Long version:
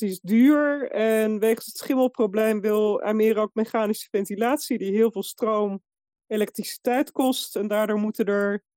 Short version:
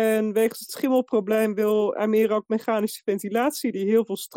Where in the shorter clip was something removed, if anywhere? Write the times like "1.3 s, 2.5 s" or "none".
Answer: none